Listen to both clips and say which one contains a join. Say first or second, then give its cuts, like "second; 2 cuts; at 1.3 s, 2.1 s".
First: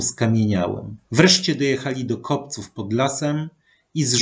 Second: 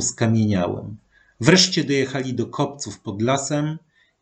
first; 1 cut; at 1.1 s